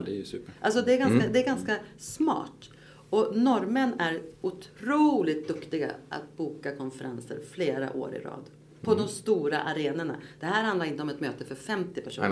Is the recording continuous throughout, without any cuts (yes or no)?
yes